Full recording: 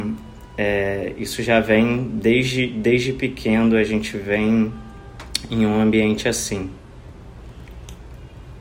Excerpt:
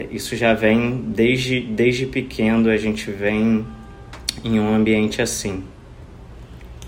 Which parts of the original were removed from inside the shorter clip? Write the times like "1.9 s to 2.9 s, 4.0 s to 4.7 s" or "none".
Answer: none